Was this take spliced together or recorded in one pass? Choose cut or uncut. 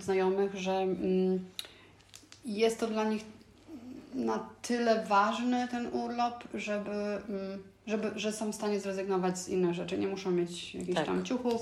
uncut